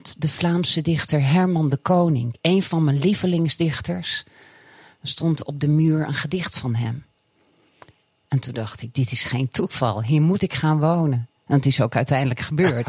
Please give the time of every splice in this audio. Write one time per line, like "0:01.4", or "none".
none